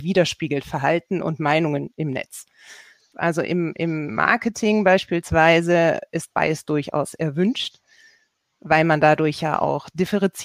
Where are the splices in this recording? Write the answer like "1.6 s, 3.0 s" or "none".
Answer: 3.1 s